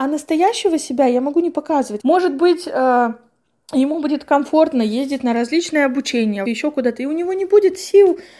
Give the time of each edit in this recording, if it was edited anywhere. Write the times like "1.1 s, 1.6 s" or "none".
2.0 s, 6.5 s